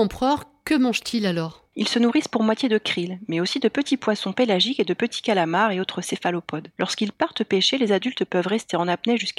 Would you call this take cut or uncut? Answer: uncut